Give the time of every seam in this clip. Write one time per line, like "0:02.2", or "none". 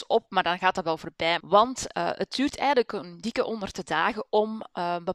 0:01.4